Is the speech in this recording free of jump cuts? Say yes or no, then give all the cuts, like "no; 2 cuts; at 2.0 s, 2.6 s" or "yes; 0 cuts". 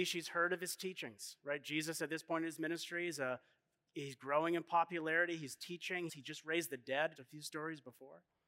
no; 2 cuts; at 6.1 s, 7.2 s